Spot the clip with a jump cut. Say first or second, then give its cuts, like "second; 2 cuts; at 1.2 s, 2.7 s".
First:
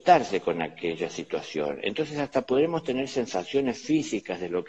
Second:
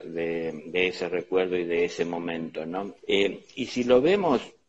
second; 1 cut; at 3.0 s